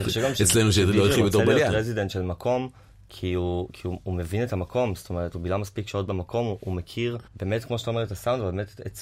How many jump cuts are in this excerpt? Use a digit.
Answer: 1